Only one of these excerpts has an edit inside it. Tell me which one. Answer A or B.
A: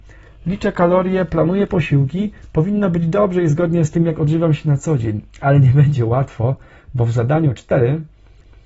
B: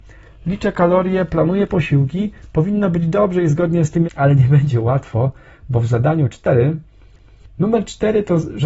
B